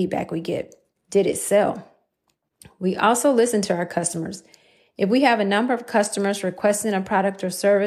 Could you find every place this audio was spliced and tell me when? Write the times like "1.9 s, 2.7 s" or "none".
none

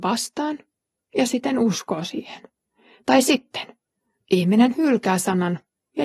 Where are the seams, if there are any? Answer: none

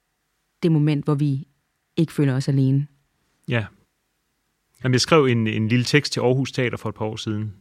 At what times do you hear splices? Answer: 4.8 s

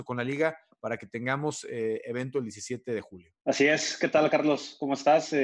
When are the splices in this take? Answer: 3.4 s

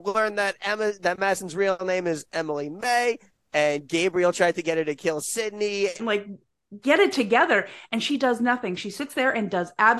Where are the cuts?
6.0 s

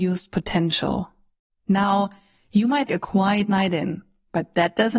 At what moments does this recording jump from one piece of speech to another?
2.9 s

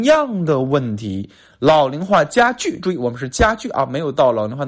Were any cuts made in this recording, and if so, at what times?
none

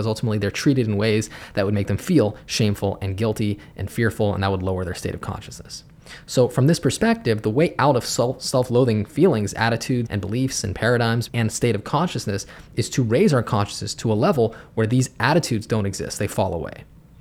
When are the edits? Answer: 10.1 s, 11.3 s

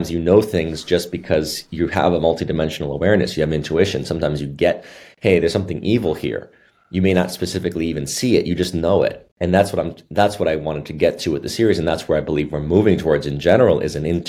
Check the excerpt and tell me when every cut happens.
3.3 s, 9.3 s

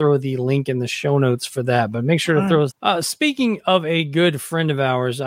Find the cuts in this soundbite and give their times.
2.7 s

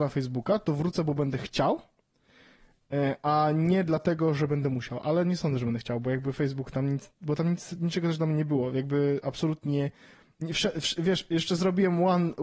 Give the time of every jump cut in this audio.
none

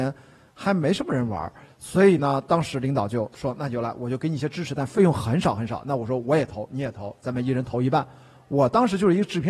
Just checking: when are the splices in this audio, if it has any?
none

